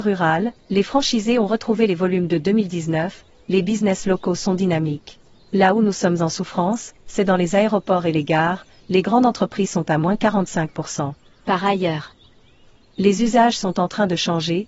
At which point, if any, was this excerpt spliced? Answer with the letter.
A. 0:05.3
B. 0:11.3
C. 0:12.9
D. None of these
D